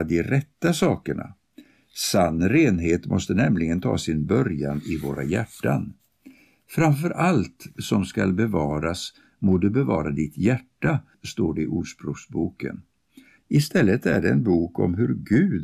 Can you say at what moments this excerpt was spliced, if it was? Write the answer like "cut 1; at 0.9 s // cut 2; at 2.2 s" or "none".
cut 1; at 11.1 s // cut 2; at 13.4 s